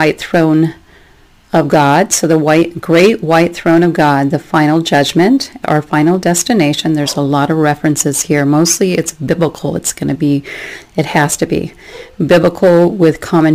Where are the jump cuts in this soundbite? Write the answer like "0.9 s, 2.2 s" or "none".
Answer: 5.6 s

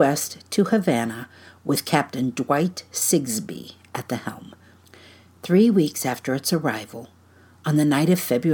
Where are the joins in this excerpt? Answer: none

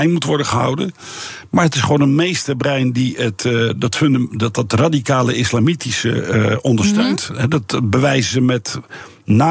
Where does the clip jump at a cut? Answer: none

